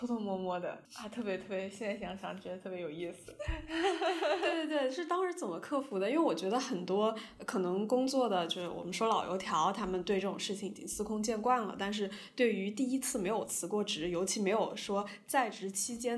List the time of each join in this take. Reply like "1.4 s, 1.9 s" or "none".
none